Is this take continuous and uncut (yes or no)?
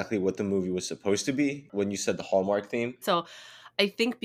no